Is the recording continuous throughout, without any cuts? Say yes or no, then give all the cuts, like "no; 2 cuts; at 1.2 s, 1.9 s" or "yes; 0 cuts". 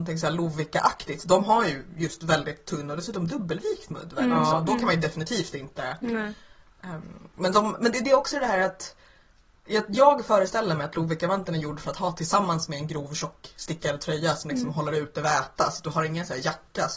yes; 0 cuts